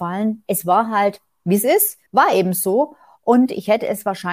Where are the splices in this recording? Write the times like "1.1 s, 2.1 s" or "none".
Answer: 2.1 s